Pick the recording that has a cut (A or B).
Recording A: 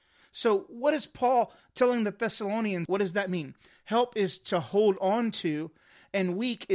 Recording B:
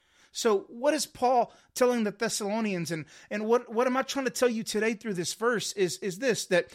A